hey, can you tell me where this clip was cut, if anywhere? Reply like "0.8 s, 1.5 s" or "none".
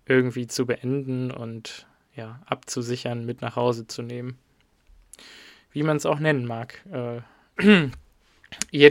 7.6 s